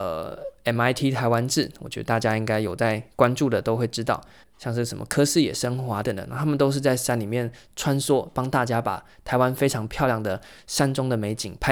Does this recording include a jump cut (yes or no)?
yes